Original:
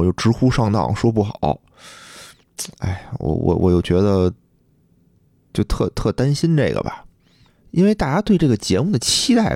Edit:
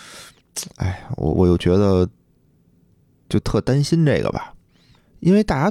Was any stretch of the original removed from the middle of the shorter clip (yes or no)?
yes